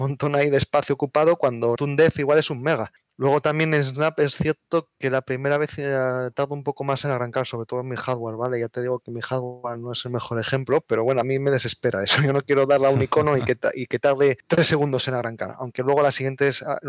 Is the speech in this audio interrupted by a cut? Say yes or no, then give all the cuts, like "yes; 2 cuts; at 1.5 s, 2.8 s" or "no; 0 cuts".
yes; 1 cut; at 1.8 s